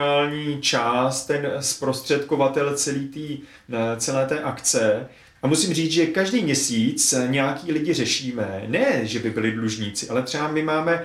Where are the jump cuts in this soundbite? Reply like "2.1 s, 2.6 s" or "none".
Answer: 5.3 s